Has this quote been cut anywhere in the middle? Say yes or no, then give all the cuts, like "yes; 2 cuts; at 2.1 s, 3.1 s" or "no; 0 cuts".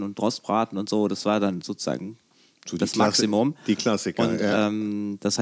no; 0 cuts